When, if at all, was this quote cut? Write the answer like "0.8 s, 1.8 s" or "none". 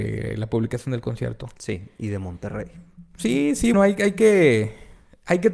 3.7 s